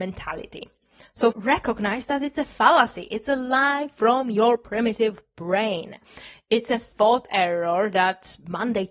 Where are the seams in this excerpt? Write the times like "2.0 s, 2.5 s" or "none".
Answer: 1.3 s